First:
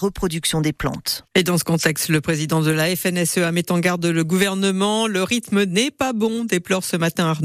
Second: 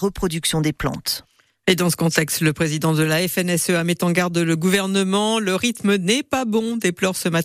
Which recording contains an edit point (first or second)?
first